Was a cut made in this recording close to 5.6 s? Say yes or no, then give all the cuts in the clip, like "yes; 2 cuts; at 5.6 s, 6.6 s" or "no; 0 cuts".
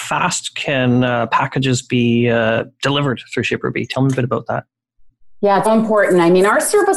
yes; 1 cut; at 5.6 s